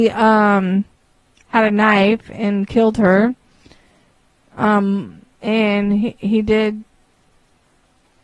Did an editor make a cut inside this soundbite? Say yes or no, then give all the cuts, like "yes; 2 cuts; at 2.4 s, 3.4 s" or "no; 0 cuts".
yes; 1 cut; at 5.4 s